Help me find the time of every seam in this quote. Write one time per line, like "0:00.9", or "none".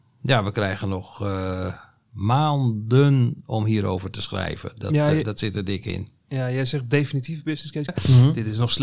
0:07.9